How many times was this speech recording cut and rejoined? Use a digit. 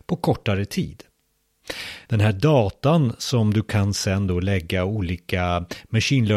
1